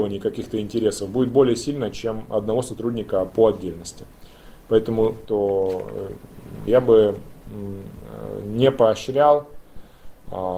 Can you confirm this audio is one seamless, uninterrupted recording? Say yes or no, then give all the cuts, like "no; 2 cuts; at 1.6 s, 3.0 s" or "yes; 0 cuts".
no; 2 cuts; at 5.2 s, 6.7 s